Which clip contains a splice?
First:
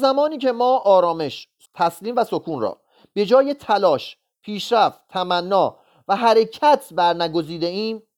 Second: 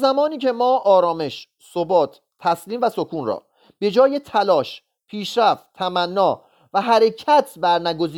first; 1 cut; at 1.6 s

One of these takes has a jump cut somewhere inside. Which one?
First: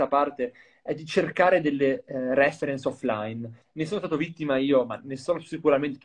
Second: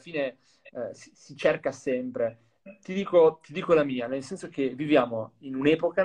first; 1 cut; at 3.6 s

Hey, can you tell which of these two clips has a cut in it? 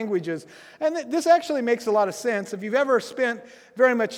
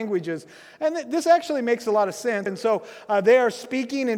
second; 1 cut; at 2.5 s

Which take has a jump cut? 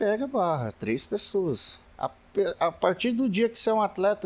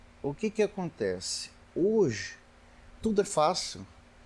first; 1 cut; at 1.8 s

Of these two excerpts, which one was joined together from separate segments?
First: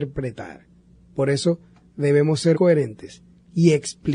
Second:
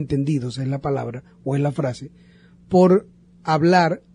first; 1 cut; at 2.5 s

